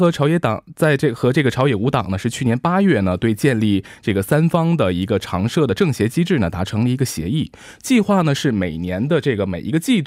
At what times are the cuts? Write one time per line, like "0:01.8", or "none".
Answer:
none